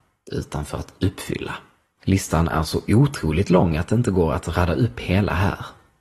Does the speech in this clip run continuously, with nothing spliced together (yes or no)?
no